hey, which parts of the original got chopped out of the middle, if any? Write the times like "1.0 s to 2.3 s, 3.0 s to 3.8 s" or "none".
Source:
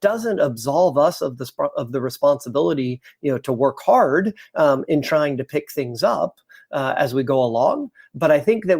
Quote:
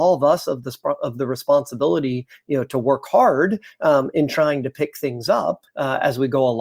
6.4 s to 6.6 s